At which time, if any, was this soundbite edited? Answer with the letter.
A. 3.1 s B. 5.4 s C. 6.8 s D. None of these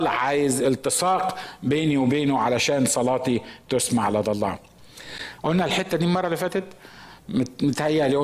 B